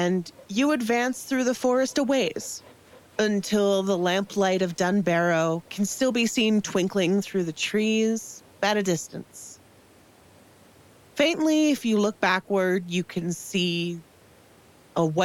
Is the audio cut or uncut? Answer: uncut